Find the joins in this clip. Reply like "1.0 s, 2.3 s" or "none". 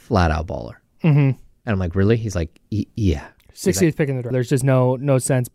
4.3 s